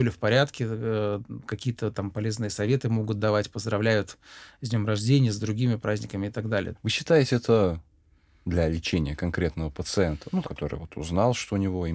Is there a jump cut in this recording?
yes; 2 cuts; at 6.8 s, 10.4 s

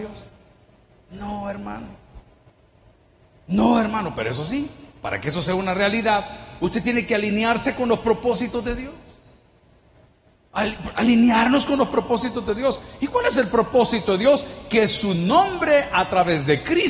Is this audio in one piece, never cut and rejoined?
yes; 0 cuts

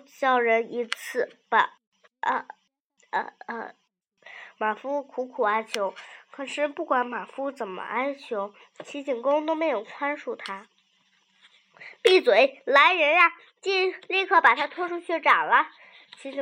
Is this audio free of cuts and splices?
yes; 0 cuts

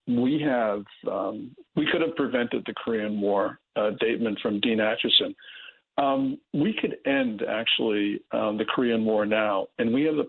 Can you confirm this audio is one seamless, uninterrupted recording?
no; 1 cut; at 4.0 s

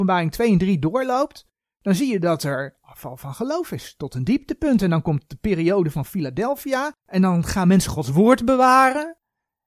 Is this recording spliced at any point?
yes; 1 cut; at 7.0 s

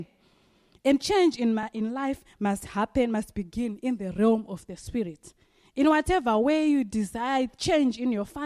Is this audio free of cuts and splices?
yes; 0 cuts

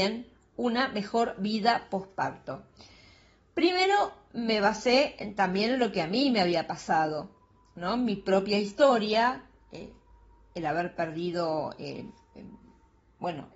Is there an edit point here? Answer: no; 0 cuts

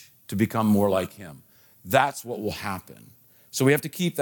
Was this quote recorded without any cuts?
yes; 0 cuts

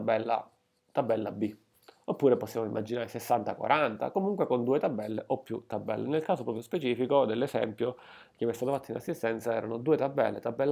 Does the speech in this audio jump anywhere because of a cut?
no; 0 cuts

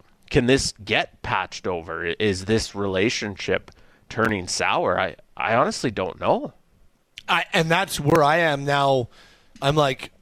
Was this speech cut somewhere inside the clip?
no; 0 cuts

